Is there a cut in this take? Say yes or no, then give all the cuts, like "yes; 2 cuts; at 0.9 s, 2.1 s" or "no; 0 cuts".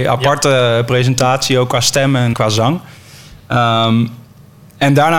yes; 1 cut; at 2.3 s